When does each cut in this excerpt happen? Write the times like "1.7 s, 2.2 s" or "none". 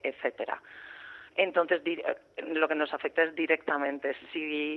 none